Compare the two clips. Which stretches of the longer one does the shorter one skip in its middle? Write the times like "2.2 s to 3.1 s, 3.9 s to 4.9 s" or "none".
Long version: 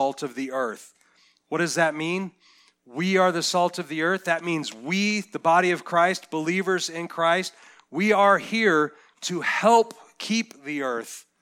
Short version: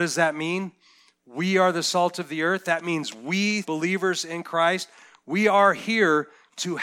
5.2 s to 6.3 s